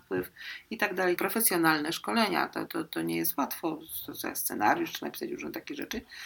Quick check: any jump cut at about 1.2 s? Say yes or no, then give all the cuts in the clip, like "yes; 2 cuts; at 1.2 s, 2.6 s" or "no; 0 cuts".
yes; 2 cuts; at 1.2 s, 2.7 s